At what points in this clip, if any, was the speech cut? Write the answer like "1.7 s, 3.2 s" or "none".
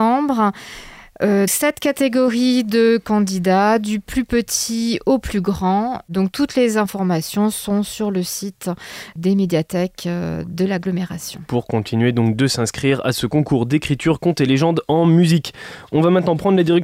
1.5 s